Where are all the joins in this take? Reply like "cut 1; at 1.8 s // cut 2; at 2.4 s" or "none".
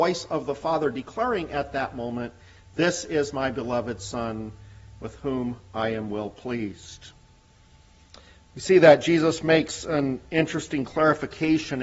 none